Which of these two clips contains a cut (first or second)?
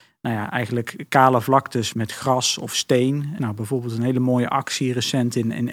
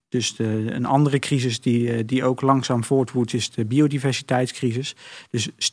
first